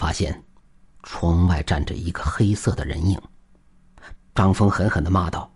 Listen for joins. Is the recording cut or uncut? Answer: cut